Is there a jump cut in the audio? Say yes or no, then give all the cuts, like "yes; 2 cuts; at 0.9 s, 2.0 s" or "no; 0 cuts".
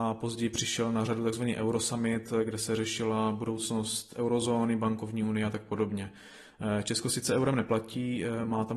no; 0 cuts